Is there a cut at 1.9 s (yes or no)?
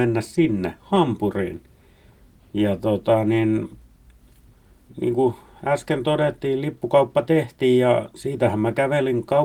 no